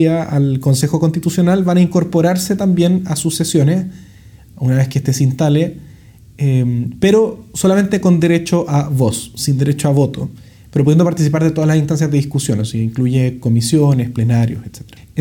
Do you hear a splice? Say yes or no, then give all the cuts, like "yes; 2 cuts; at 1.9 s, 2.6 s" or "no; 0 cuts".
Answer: no; 0 cuts